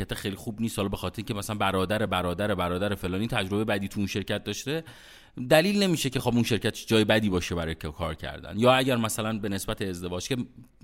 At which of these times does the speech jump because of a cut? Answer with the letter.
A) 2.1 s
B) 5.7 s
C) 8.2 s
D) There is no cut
D